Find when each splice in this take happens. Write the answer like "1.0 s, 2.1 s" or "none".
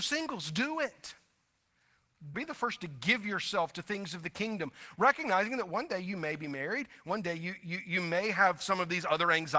2.3 s

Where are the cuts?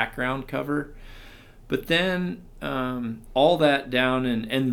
3.3 s

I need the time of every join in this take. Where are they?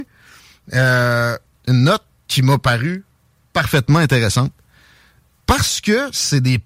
1.5 s, 5.3 s

